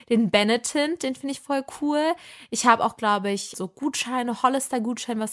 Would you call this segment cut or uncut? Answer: cut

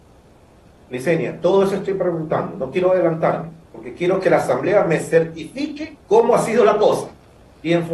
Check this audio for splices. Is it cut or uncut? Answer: cut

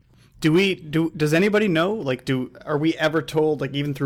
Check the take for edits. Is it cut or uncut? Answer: uncut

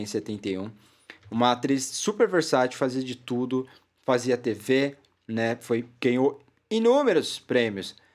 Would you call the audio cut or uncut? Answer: uncut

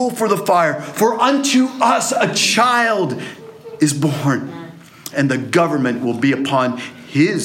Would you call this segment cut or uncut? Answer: cut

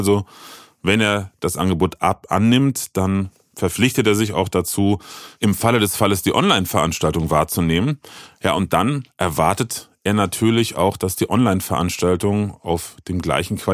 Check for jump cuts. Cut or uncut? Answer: uncut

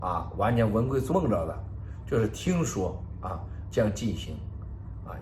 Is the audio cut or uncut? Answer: cut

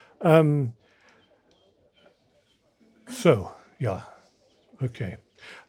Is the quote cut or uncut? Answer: uncut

